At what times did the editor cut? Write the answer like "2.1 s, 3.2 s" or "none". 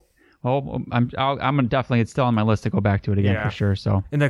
none